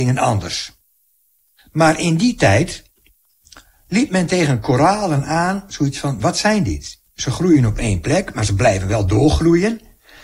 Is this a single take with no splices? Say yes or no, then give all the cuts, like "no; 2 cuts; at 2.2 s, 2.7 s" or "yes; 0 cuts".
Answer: yes; 0 cuts